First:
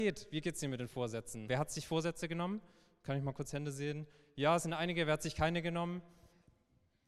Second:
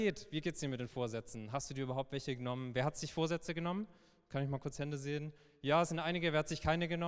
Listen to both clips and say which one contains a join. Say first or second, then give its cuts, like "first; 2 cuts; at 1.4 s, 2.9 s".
first; 1 cut; at 1.5 s